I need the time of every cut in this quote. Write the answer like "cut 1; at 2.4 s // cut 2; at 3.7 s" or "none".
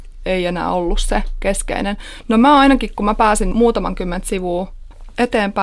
none